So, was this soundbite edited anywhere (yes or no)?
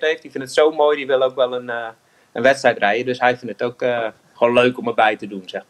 no